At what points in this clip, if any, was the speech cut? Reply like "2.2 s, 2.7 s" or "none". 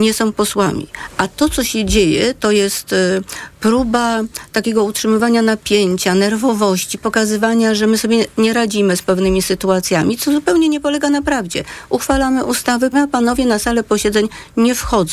12.9 s